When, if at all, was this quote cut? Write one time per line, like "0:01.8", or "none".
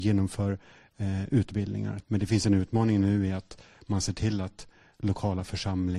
0:02.0